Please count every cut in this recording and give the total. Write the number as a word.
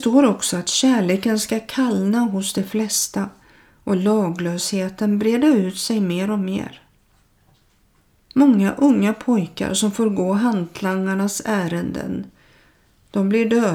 one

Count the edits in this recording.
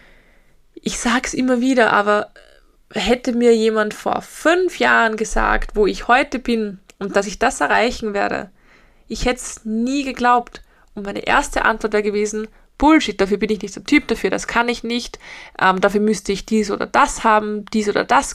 zero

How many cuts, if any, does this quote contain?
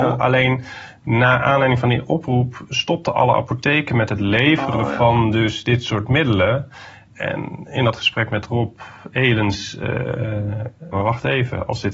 one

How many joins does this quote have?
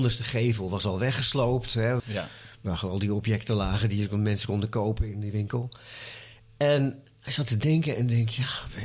one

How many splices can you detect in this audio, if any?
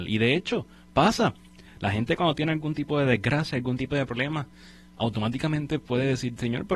zero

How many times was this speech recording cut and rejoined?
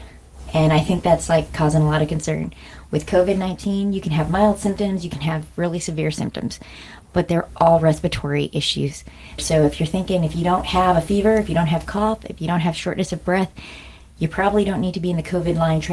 one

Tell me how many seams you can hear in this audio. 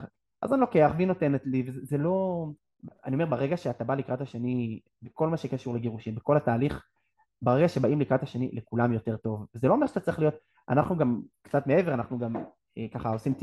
zero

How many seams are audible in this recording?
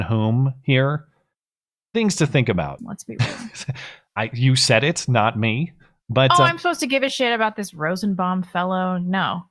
one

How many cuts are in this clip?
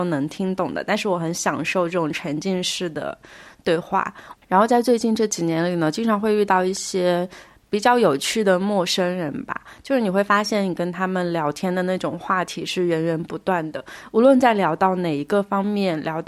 one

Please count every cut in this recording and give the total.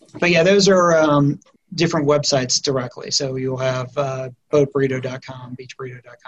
one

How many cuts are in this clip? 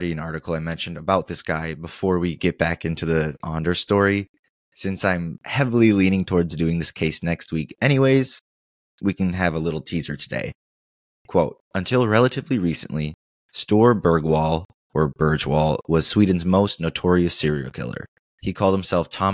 two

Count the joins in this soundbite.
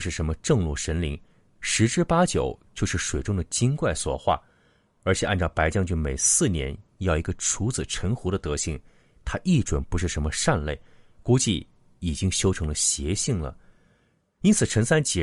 zero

